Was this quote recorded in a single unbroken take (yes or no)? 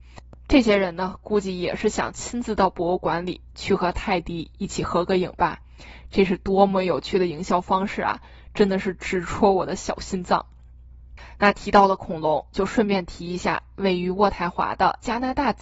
yes